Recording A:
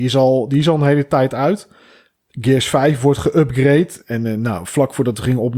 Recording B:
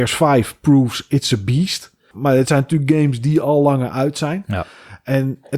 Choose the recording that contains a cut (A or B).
B